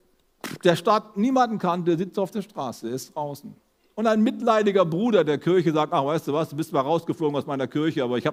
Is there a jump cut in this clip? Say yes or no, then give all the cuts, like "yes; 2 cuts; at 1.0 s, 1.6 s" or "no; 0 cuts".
no; 0 cuts